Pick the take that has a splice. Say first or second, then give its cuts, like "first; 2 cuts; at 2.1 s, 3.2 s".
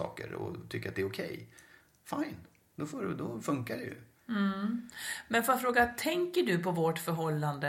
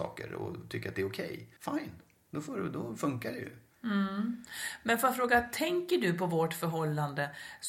second; 1 cut; at 1.6 s